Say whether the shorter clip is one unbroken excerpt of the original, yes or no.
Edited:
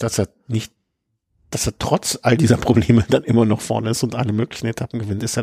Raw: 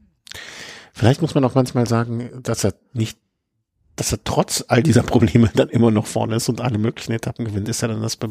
yes